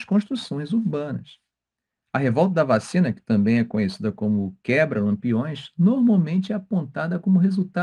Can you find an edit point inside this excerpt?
no; 0 cuts

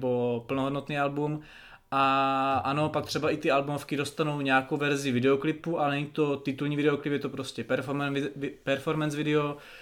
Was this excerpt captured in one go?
yes; 0 cuts

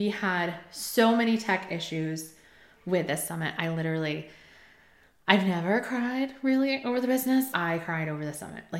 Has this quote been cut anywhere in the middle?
yes; 1 cut; at 7.5 s

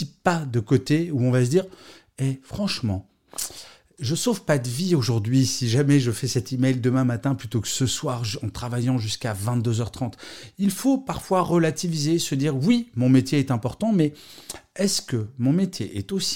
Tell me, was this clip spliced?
no; 0 cuts

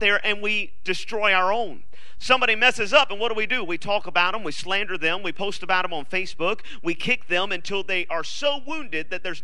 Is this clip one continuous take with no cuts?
yes; 0 cuts

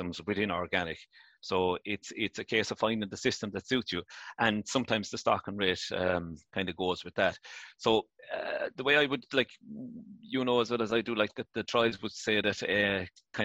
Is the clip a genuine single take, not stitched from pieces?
yes; 0 cuts

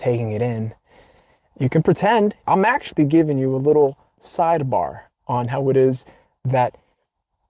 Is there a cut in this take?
yes; 1 cut; at 2.4 s

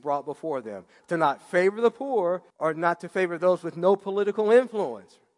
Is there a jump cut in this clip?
yes; 2 cuts; at 1.0 s, 2.5 s

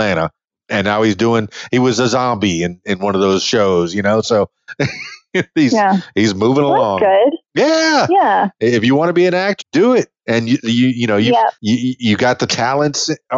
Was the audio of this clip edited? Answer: yes; 2 cuts; at 9.6 s, 11.6 s

